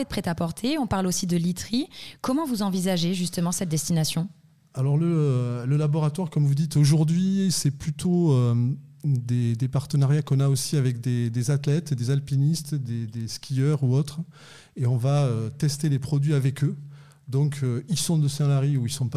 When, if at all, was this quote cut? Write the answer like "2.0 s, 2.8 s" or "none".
none